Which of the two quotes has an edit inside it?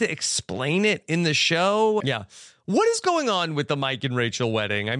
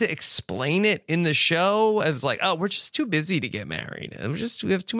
first; 1 cut; at 2.0 s

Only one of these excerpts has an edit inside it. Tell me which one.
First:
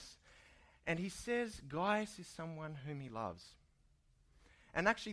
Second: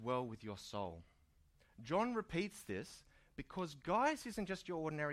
second; 1 cut; at 1.6 s

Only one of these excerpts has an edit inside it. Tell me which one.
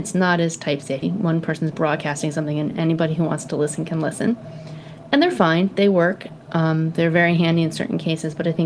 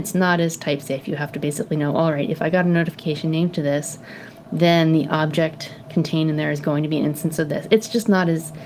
first; 1 cut; at 1.0 s

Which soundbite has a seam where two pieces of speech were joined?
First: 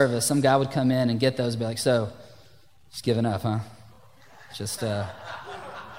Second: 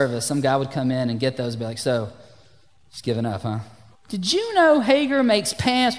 second; 1 cut; at 4.0 s

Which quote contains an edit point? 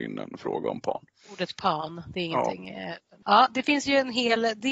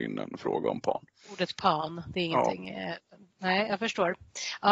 first; 1 cut; at 3.2 s

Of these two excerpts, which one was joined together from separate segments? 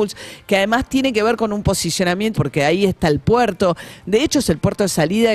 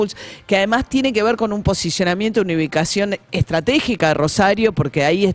first; 1 cut; at 2.3 s

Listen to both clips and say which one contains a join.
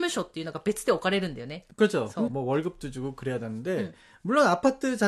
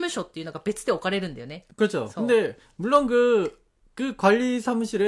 first; 1 cut; at 2.3 s

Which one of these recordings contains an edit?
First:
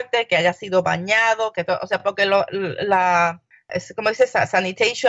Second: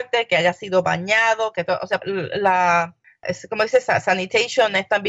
second; 1 cut; at 2.0 s

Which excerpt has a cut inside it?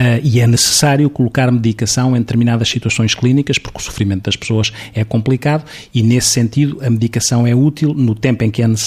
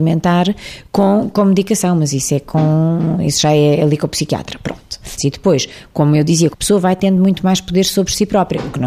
second; 2 cuts; at 5.2 s, 6.5 s

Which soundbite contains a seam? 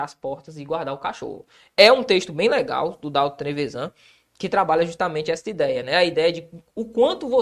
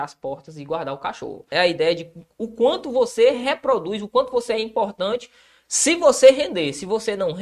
second; 1 cut; at 1.5 s

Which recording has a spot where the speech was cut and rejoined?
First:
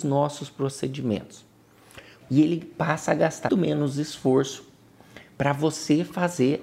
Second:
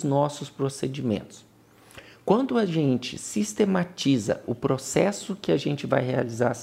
first; 2 cuts; at 2.2 s, 3.5 s

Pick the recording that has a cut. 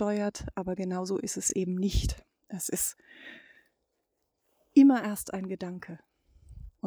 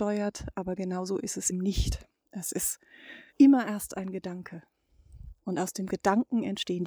second; 2 cuts; at 1.5 s, 3.3 s

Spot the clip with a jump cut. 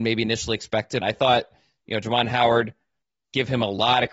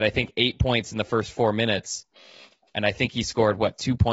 first; 1 cut; at 1.0 s

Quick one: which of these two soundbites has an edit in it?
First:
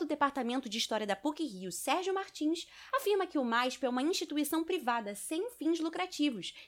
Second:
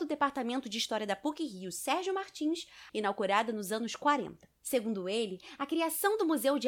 second; 1 cut; at 2.9 s

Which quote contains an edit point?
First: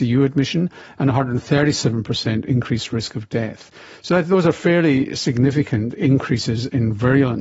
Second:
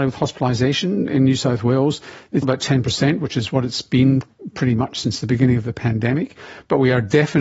second; 1 cut; at 2.4 s

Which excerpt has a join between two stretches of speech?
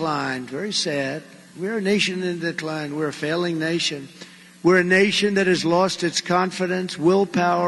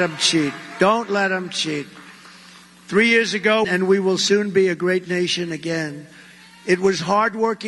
second; 1 cut; at 3.6 s

